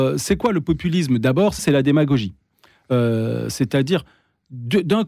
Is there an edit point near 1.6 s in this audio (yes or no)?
yes